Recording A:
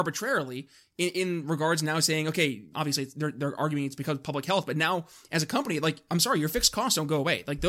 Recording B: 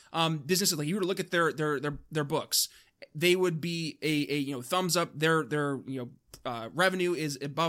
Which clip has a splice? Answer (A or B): A